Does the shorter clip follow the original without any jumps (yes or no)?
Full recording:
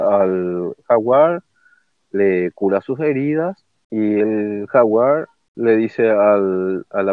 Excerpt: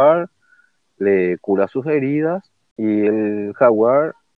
yes